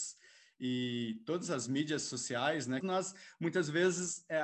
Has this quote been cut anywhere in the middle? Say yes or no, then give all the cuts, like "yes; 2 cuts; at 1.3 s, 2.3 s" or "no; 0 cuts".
yes; 1 cut; at 2.8 s